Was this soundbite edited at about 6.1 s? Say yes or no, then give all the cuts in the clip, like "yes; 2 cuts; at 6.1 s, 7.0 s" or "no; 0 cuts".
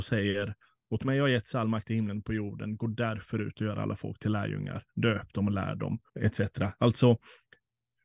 yes; 1 cut; at 6.1 s